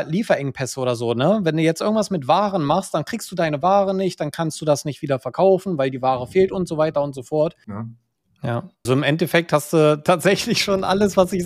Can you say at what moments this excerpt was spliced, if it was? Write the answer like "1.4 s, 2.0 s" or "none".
7.6 s, 8.9 s